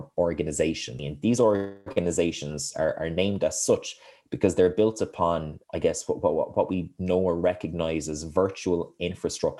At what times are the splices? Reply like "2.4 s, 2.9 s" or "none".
1.0 s